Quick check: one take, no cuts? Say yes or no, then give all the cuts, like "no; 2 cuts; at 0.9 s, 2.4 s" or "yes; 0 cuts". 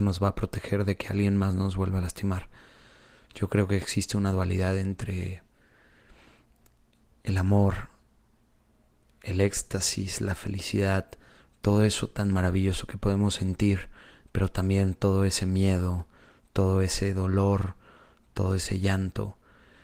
yes; 0 cuts